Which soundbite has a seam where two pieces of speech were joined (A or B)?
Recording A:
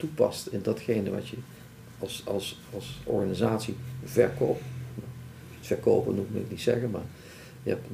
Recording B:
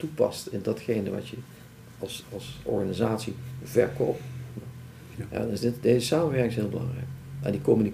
B